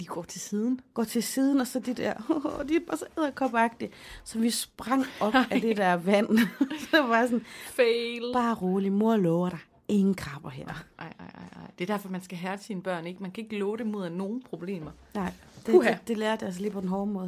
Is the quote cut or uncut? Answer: uncut